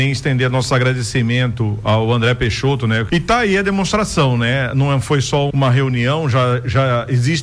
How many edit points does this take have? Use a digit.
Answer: 2